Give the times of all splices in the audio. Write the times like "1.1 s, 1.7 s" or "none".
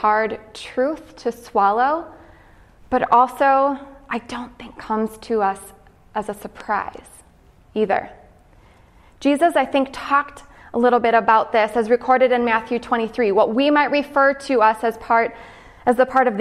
none